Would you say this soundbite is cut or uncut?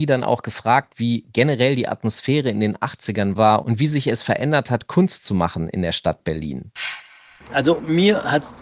uncut